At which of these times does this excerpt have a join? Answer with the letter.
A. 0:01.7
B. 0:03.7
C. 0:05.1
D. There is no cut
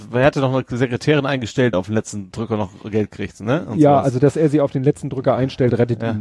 A